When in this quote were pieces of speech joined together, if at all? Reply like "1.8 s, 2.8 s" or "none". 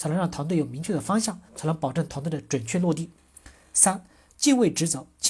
1.5 s